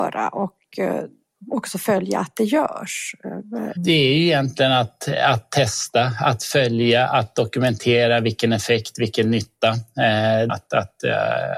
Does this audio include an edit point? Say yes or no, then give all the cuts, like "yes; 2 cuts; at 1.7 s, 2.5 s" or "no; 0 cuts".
yes; 2 cuts; at 3.8 s, 10.5 s